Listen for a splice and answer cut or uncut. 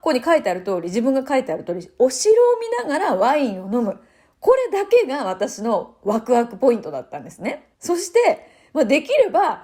cut